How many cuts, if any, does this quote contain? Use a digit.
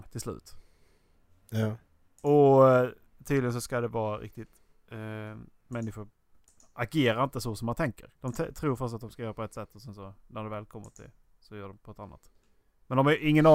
2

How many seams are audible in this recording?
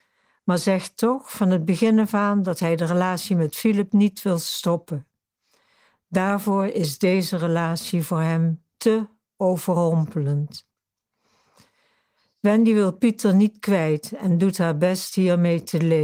0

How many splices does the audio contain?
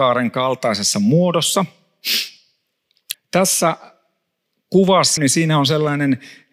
2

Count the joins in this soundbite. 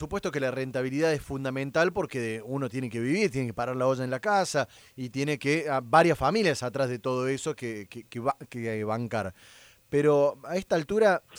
0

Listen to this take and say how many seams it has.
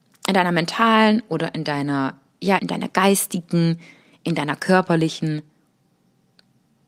1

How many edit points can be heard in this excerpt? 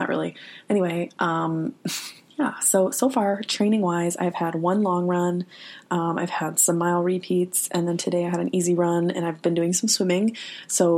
0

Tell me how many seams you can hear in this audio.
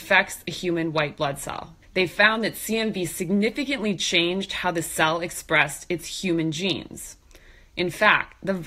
1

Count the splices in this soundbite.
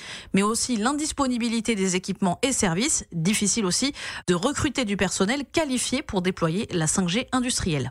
0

